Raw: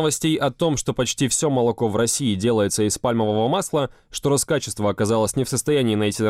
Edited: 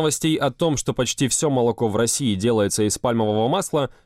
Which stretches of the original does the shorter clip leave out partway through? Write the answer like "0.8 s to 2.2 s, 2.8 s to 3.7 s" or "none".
none